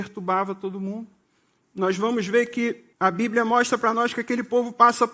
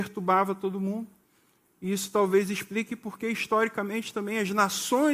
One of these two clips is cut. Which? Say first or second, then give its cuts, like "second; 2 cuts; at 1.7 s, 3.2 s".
first; 2 cuts; at 1.6 s, 2.9 s